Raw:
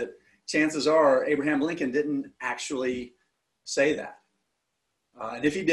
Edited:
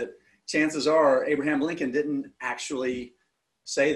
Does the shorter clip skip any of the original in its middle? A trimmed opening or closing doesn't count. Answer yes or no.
no